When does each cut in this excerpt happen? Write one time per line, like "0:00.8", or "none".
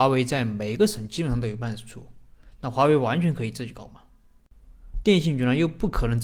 0:05.0